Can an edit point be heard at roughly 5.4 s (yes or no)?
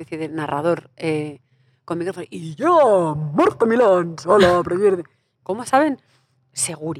yes